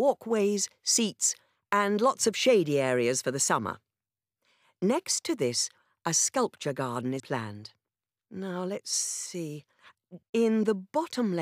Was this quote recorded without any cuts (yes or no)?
no